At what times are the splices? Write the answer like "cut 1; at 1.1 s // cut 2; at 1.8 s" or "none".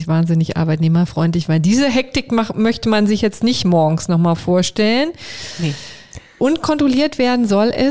cut 1; at 6.4 s